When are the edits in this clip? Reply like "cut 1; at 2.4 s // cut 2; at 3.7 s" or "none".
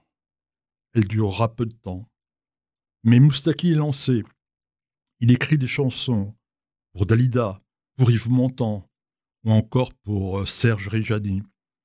cut 1; at 7.9 s